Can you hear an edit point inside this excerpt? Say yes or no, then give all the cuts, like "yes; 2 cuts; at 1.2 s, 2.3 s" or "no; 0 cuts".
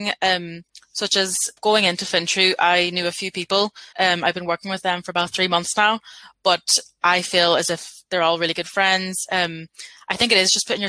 yes; 2 cuts; at 1.6 s, 3.9 s